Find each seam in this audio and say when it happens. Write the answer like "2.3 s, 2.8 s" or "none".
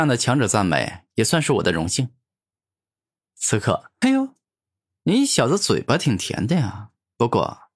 4.0 s